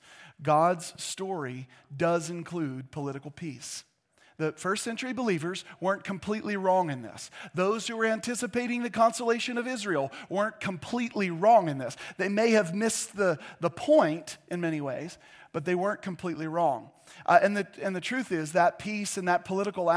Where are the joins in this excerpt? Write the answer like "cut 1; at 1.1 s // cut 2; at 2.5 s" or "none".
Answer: none